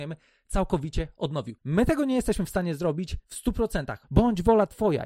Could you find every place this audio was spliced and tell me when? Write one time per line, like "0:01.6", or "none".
0:04.0